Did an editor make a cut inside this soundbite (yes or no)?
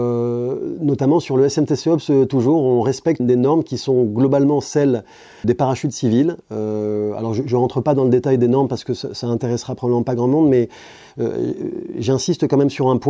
yes